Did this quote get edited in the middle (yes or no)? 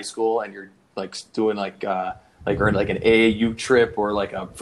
no